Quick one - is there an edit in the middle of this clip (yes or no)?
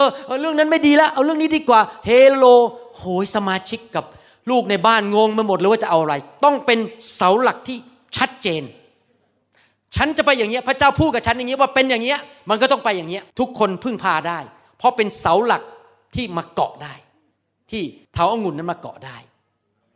yes